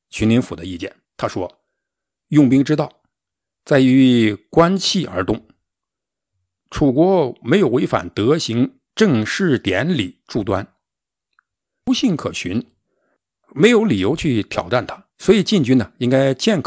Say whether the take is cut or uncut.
cut